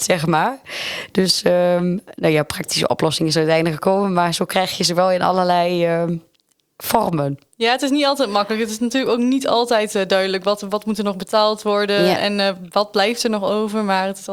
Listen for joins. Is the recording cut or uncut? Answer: uncut